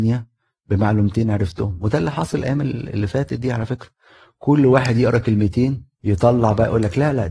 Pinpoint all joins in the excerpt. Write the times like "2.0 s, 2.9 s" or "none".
5.9 s